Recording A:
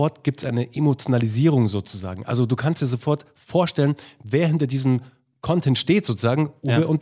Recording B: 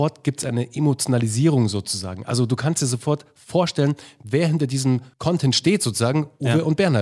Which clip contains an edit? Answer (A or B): B